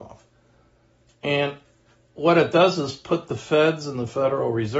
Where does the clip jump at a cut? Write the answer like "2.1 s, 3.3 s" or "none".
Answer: 1.1 s